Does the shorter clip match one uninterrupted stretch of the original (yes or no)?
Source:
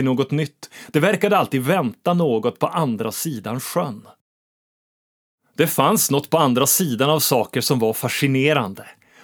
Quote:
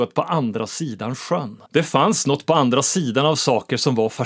no